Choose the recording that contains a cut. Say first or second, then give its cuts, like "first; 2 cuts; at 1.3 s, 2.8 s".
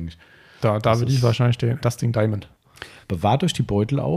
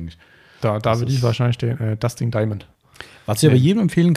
first; 2 cuts; at 1.8 s, 3.0 s